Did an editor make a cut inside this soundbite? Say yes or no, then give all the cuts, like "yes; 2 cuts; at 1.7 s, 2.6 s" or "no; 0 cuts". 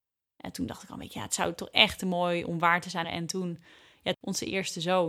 yes; 2 cuts; at 3.0 s, 4.1 s